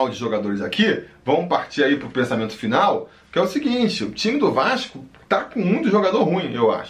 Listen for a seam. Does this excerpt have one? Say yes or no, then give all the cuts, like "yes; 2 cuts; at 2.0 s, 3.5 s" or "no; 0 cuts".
no; 0 cuts